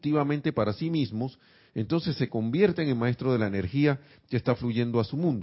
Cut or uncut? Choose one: uncut